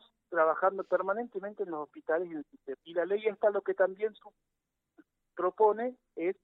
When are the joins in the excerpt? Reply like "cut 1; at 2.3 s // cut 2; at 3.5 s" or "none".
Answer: cut 1; at 2.8 s